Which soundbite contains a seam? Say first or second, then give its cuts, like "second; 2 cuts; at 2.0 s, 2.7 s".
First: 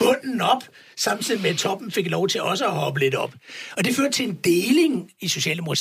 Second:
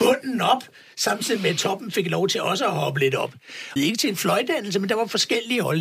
second; 1 cut; at 3.8 s